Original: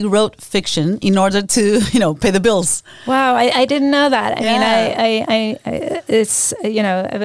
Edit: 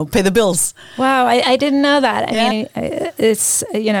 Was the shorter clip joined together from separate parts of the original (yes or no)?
yes